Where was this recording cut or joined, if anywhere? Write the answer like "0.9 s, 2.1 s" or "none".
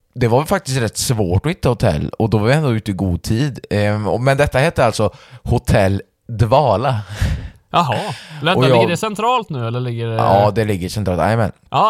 none